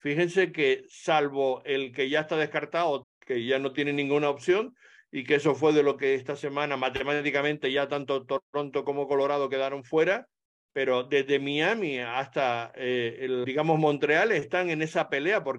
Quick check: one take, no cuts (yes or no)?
no